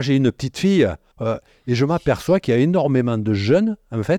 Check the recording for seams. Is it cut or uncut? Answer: cut